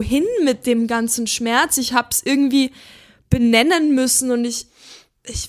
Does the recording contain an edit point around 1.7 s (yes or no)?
no